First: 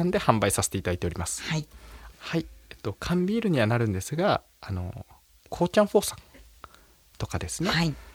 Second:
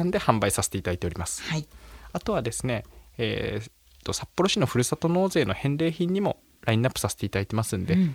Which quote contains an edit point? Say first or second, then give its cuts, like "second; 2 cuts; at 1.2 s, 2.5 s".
first; 2 cuts; at 2.1 s, 5.5 s